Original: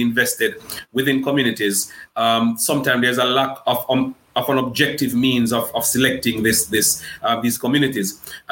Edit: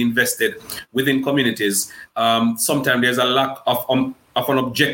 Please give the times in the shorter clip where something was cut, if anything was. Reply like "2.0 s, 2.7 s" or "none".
none